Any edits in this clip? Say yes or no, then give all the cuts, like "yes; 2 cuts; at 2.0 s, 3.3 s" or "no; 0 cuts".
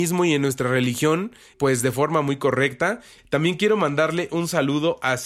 yes; 2 cuts; at 1.5 s, 3.2 s